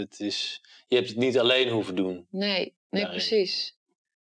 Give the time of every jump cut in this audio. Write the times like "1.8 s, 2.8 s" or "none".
none